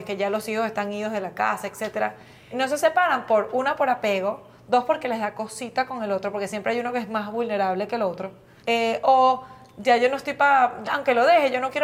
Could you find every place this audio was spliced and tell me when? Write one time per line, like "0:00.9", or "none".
0:02.5
0:08.6
0:10.8